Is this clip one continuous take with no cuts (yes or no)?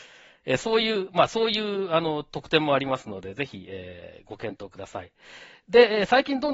yes